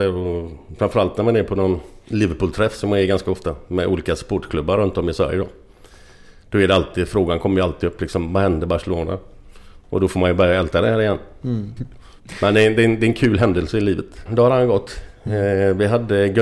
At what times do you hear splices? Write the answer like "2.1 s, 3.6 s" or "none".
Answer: 11.8 s, 14.3 s